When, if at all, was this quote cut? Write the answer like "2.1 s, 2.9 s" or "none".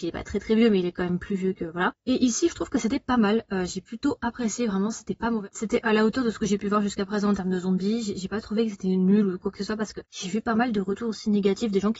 2.5 s